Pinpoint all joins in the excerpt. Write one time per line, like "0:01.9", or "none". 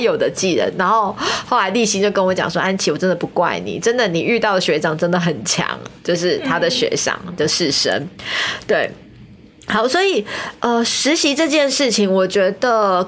none